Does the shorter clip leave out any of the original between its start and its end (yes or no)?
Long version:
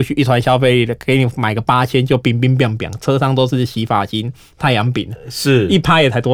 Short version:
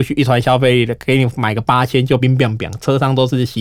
yes